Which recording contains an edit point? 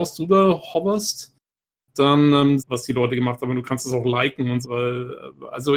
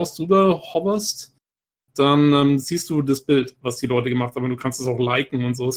first; 2 cuts; at 2.6 s, 4.6 s

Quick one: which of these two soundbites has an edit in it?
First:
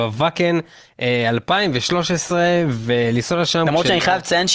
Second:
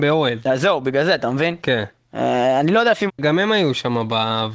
second; 1 cut; at 3.1 s

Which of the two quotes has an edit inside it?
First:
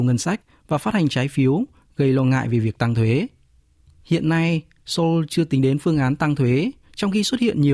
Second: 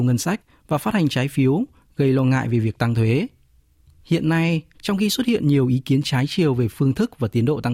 second; 1 cut; at 4.7 s

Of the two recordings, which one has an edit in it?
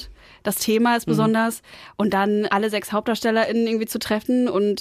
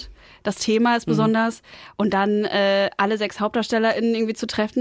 first; 1 cut; at 2.5 s

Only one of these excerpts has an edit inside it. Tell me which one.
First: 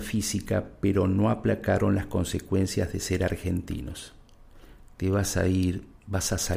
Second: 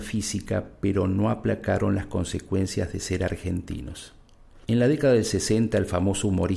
second; 1 cut; at 4.6 s

